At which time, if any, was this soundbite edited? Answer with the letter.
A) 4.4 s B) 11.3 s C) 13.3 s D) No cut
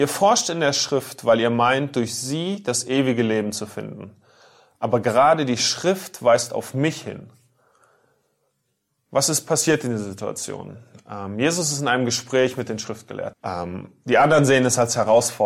C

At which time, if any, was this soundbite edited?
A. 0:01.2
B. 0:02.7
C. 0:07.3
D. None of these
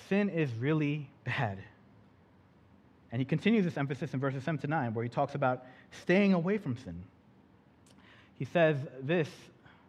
A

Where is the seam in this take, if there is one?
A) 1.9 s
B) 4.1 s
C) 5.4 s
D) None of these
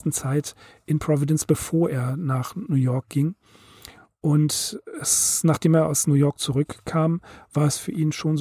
D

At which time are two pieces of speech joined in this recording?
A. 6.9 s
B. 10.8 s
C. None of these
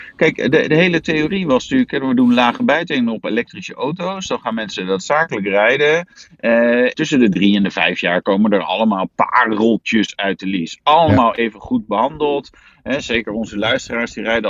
A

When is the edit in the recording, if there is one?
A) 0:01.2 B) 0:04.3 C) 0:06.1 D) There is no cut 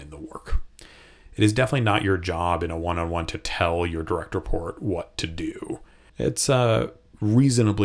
C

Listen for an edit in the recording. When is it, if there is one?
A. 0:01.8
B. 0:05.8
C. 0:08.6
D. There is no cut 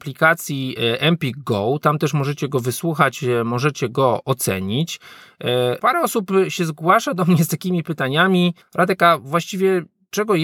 B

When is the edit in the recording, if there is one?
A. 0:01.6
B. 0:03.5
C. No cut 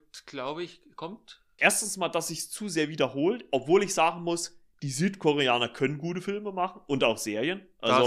A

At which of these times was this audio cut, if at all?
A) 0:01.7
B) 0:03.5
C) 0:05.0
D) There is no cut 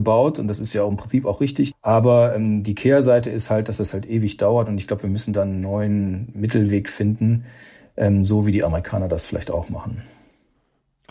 A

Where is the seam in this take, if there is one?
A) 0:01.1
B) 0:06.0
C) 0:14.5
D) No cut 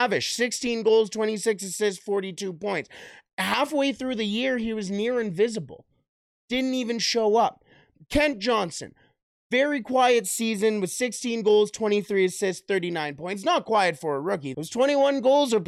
C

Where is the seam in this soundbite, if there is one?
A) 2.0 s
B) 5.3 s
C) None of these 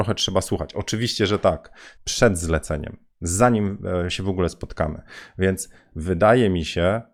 A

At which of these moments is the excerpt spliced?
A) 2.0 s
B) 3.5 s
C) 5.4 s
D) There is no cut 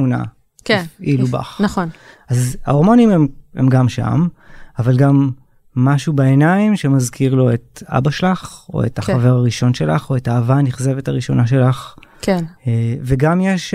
D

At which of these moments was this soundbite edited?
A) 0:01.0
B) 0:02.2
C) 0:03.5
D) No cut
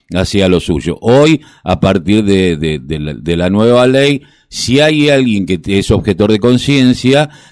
D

